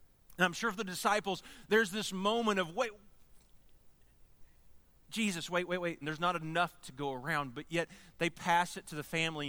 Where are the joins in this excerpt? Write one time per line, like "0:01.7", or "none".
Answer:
0:06.0